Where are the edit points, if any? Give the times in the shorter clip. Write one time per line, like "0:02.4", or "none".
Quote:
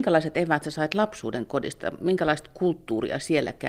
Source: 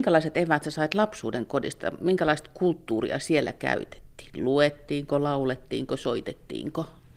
none

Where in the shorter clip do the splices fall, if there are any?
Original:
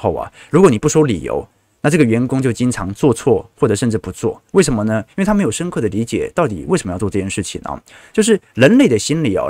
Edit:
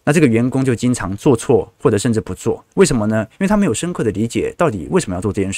none

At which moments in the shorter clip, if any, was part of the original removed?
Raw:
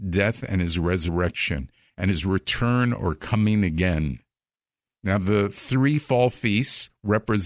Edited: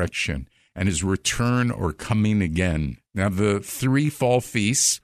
0:03.1

